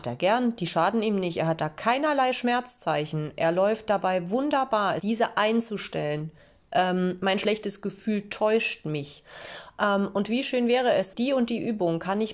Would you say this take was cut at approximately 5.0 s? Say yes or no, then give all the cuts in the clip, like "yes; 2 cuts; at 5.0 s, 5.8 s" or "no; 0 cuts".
yes; 2 cuts; at 5.0 s, 11.1 s